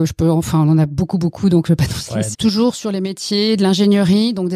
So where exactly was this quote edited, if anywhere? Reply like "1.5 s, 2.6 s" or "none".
2.3 s